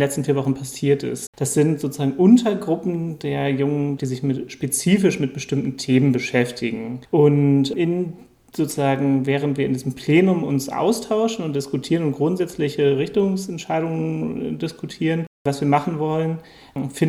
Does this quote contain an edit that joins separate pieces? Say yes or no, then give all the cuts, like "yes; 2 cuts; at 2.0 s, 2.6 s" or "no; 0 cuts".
yes; 2 cuts; at 1.3 s, 4.0 s